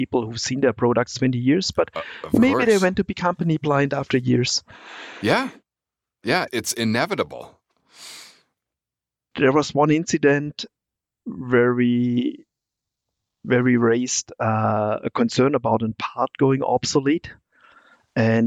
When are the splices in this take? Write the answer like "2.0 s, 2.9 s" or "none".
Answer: none